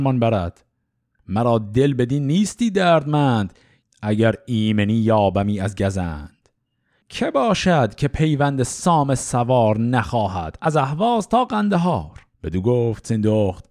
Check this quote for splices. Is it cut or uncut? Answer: cut